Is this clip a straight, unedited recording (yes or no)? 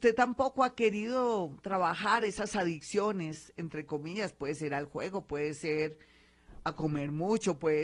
yes